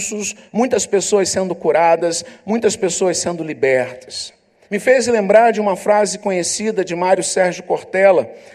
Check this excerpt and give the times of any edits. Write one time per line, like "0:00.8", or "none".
0:04.6